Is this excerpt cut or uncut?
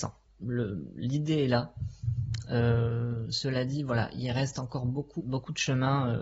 cut